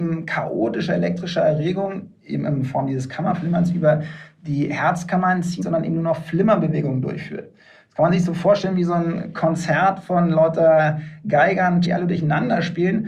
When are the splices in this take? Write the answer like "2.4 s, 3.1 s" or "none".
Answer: 5.6 s, 11.8 s